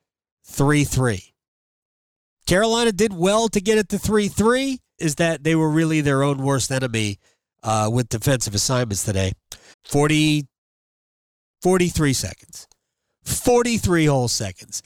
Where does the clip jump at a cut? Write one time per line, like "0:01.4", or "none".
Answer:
0:05.0
0:09.7